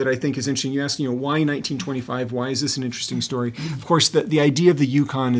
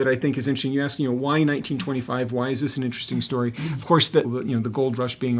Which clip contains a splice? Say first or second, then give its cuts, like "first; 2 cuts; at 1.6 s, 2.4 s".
second; 1 cut; at 4.2 s